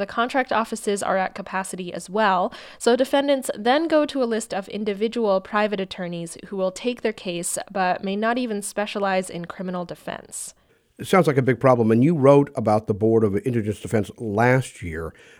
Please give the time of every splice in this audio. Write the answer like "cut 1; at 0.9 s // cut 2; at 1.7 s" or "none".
none